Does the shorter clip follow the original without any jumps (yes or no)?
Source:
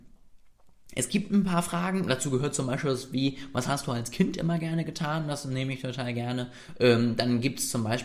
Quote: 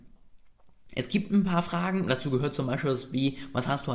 yes